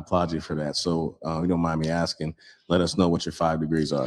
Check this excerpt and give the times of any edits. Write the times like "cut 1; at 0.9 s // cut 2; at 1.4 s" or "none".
none